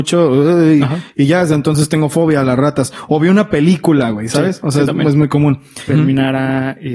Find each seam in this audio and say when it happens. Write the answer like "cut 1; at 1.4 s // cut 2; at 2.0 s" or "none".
cut 1; at 5.9 s